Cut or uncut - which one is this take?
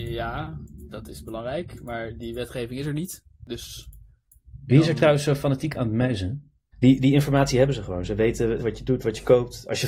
cut